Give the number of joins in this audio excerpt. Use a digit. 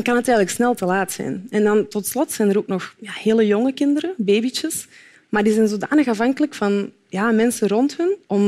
1